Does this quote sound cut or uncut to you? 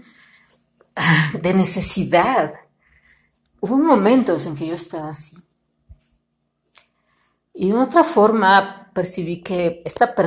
uncut